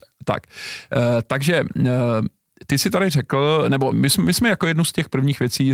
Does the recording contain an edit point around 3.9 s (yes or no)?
yes